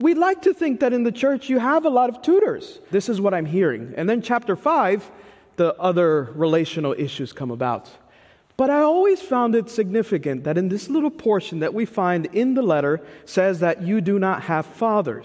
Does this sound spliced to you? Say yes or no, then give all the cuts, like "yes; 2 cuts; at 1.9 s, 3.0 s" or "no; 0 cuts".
yes; 1 cut; at 2.9 s